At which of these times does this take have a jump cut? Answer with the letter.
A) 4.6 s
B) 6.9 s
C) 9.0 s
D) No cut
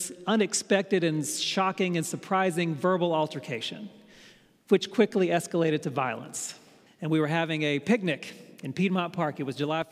B